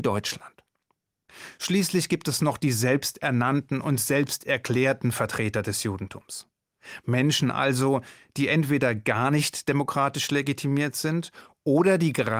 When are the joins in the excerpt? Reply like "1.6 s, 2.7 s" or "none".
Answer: none